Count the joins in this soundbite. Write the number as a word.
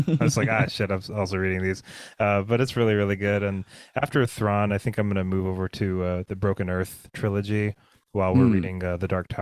zero